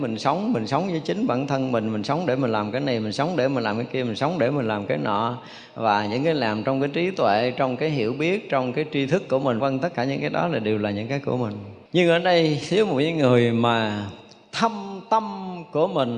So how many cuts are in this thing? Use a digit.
2